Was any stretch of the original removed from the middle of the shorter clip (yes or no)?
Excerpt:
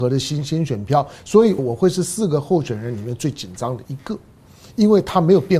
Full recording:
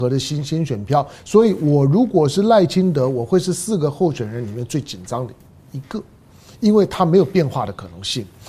yes